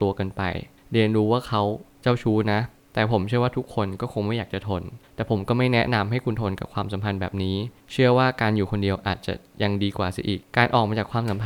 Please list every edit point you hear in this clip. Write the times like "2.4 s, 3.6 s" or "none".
10.4 s